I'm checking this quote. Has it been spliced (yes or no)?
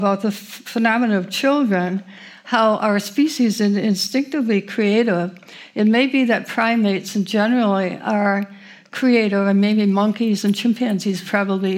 no